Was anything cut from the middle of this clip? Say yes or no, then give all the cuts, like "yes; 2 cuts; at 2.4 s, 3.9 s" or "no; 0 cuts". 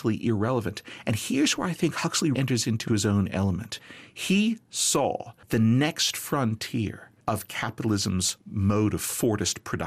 yes; 1 cut; at 2.3 s